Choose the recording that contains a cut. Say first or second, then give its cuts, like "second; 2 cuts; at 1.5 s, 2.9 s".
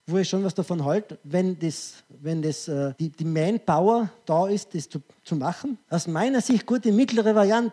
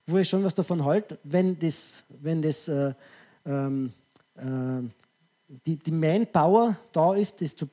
first; 2 cuts; at 2.9 s, 5.8 s